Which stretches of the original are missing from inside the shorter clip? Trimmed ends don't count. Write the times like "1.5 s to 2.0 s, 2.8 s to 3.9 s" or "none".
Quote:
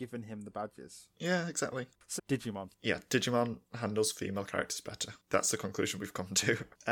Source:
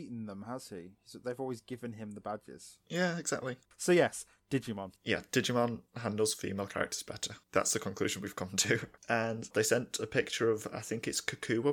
3.9 s to 4.4 s